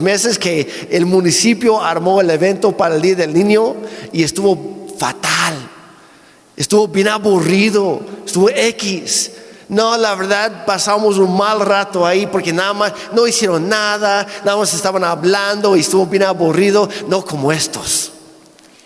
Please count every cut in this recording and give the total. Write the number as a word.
zero